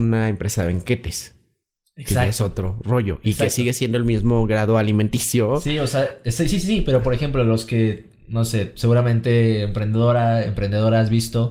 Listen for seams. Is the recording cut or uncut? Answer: uncut